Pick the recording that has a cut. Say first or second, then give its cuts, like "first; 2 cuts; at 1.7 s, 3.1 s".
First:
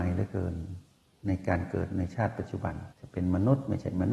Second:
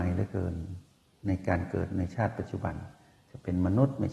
first; 1 cut; at 2.9 s